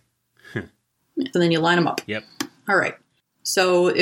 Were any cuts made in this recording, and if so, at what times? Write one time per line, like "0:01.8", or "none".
0:01.3